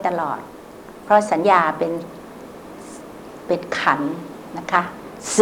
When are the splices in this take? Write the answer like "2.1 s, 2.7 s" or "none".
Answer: 1.4 s